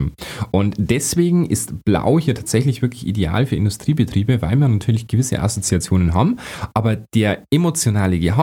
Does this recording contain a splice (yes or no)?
no